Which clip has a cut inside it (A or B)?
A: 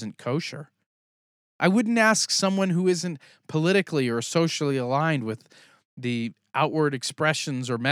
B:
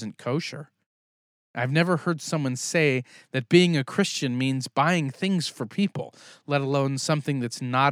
B